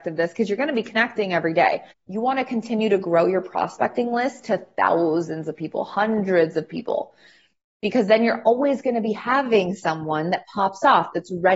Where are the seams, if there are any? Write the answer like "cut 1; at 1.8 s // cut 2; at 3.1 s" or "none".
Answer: cut 1; at 1.9 s